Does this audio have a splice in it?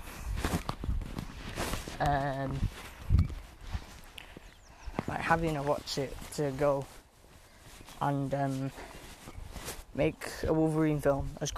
no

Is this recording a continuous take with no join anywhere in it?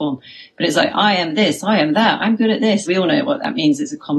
no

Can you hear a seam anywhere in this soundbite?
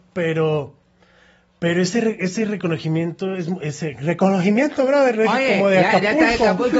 no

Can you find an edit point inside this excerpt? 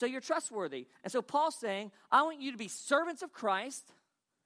no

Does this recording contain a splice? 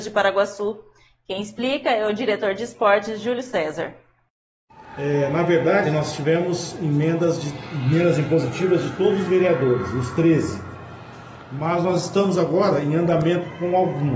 no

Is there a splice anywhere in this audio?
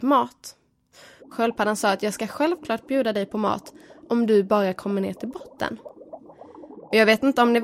yes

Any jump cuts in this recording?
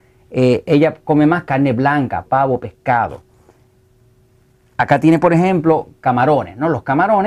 yes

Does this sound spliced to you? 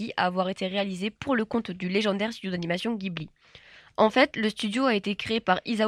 no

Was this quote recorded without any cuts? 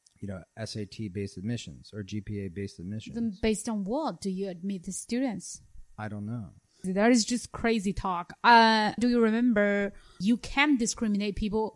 no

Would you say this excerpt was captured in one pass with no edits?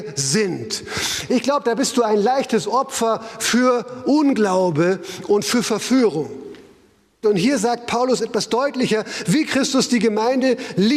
no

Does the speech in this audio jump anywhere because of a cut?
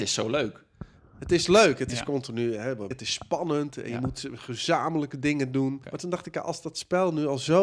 yes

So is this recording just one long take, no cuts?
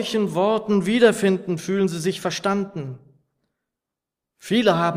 yes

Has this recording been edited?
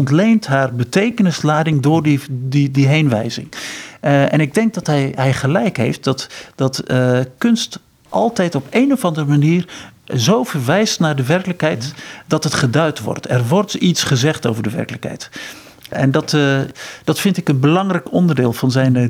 no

